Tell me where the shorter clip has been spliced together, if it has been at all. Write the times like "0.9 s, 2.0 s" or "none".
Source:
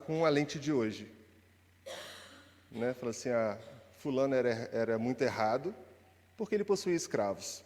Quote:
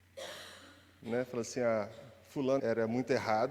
2.6 s